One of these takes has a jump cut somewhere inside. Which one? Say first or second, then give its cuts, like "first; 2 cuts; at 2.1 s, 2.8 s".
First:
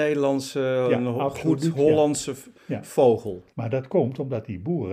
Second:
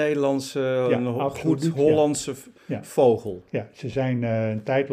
first; 1 cut; at 3.5 s